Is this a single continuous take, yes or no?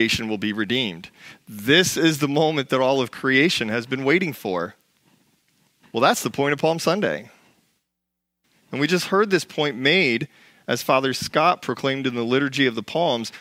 no